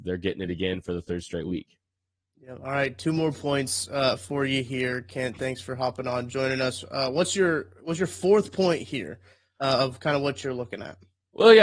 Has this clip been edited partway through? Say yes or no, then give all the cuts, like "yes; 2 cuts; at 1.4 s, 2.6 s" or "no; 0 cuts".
no; 0 cuts